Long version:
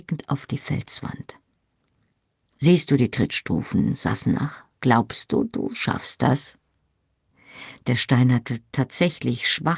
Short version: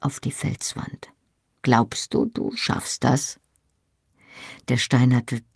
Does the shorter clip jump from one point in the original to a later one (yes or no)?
yes